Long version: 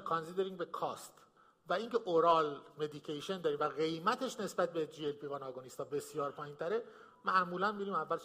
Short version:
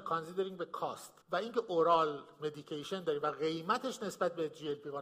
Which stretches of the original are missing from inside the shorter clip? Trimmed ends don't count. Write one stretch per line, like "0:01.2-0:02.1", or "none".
0:01.2-0:01.6